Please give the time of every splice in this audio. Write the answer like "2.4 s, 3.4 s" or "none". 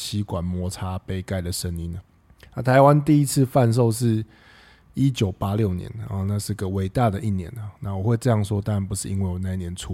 none